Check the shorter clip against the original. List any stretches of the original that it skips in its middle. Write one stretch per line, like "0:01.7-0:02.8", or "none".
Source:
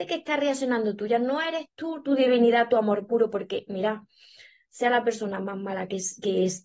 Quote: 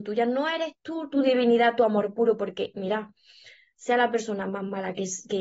none